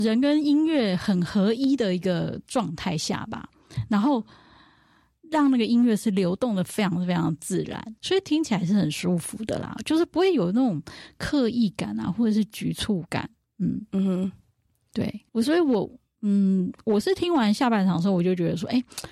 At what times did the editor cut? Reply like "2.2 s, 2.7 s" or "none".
8.0 s, 13.5 s, 15.3 s